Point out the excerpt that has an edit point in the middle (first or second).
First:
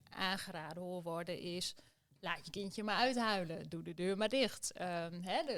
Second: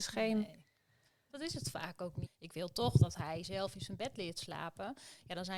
second